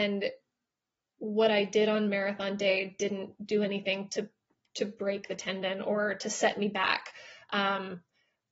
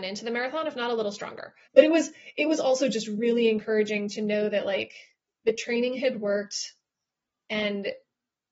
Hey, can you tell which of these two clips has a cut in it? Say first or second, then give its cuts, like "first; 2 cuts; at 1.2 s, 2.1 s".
second; 1 cut; at 1.7 s